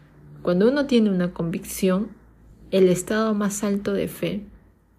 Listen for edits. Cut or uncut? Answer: uncut